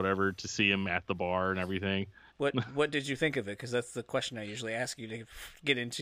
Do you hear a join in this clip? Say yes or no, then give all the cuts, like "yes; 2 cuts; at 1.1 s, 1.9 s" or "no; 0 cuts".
yes; 1 cut; at 2.3 s